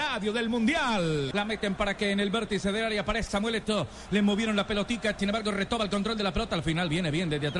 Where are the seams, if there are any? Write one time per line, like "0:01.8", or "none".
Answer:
0:01.3
0:03.3
0:05.2